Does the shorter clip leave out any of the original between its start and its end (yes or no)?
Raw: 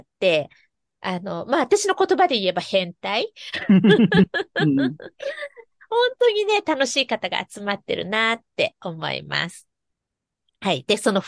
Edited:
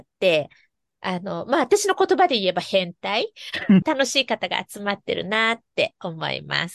yes